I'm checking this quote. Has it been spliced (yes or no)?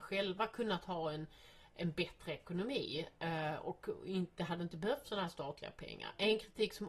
no